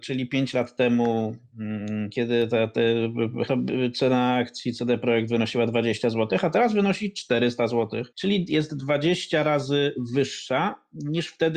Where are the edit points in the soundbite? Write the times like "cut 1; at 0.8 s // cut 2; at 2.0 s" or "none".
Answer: cut 1; at 3.5 s // cut 2; at 8.1 s